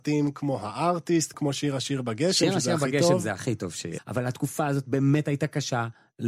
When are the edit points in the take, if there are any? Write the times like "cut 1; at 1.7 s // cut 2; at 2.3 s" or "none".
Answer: cut 1; at 1.3 s // cut 2; at 4.0 s

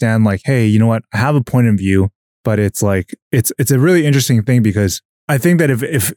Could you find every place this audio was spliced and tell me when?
cut 1; at 2.3 s

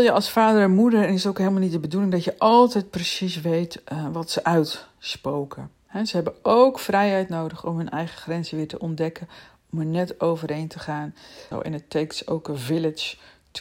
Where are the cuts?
cut 1; at 11.5 s

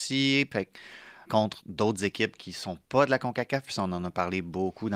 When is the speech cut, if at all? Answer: cut 1; at 1.2 s

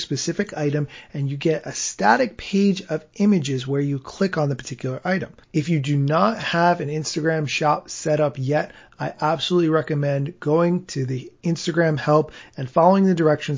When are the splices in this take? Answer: cut 1; at 5.4 s

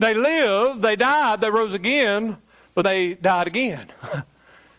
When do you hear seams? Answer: cut 1; at 2.8 s

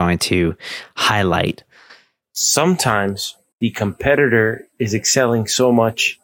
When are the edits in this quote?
cut 1; at 2.2 s // cut 2; at 3.5 s

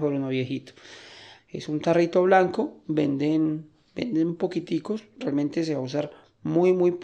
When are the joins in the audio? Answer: cut 1; at 1.4 s

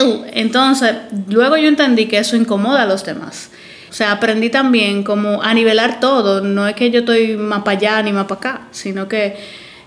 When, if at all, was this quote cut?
cut 1; at 3.9 s

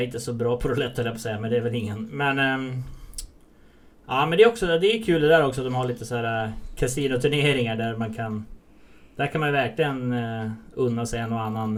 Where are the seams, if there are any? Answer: none

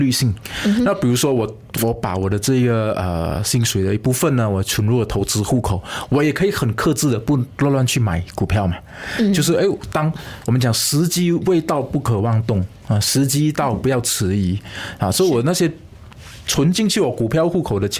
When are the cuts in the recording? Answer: none

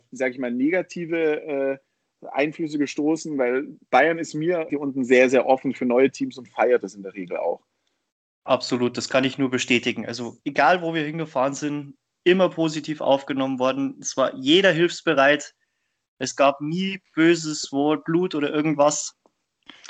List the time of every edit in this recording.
cut 1; at 4.7 s

